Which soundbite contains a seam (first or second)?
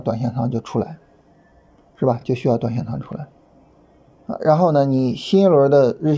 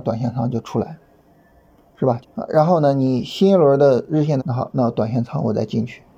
second